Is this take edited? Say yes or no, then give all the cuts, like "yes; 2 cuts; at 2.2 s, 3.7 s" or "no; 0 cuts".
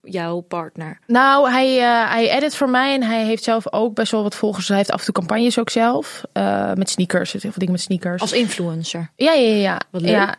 no; 0 cuts